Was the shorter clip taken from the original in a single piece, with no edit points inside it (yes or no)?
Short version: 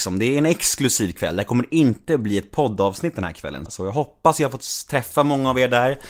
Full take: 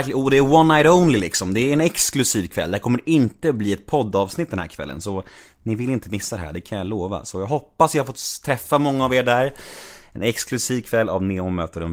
no